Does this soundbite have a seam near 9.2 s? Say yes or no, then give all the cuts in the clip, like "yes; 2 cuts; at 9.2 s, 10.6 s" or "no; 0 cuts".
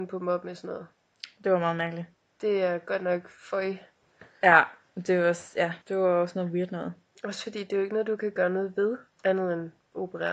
yes; 2 cuts; at 5.8 s, 9.2 s